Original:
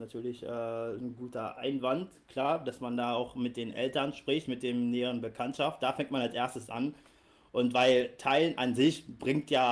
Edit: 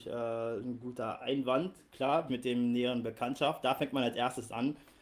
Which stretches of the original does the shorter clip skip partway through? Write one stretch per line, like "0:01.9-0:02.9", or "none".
0:02.6-0:04.5